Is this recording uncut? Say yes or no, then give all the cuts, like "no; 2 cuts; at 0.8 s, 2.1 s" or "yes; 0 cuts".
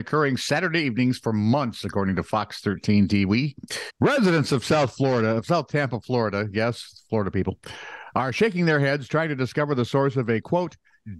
no; 1 cut; at 3.9 s